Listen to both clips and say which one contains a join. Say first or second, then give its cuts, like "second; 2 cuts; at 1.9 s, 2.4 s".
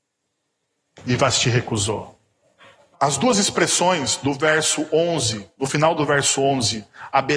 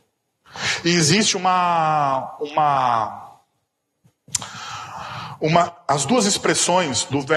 first; 1 cut; at 2.9 s